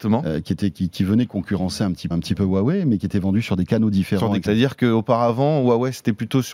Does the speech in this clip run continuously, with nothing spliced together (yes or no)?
no